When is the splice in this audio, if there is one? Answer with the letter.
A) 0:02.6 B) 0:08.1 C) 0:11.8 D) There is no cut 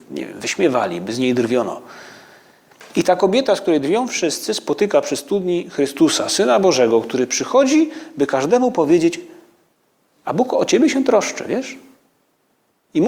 D